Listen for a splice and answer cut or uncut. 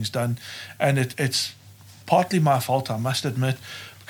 cut